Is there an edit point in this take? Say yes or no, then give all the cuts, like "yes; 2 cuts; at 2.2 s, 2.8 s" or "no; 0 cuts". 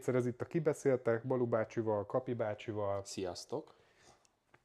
no; 0 cuts